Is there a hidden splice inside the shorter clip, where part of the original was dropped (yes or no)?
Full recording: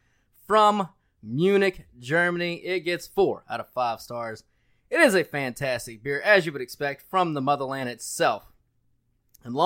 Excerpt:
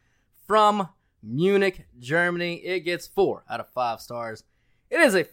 no